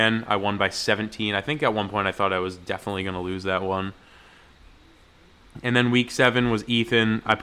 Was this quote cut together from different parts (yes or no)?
no